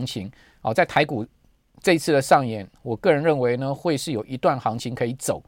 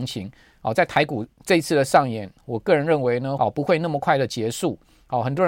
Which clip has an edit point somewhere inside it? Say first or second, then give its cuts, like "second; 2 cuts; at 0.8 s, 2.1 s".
second; 2 cuts; at 1.3 s, 3.4 s